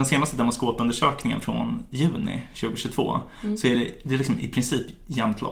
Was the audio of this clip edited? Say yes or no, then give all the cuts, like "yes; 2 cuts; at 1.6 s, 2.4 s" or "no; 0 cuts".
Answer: no; 0 cuts